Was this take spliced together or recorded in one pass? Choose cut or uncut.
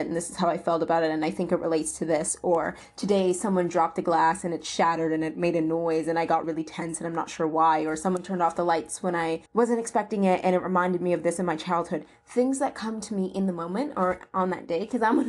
cut